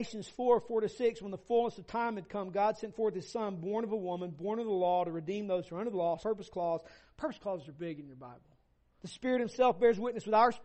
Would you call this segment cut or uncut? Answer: cut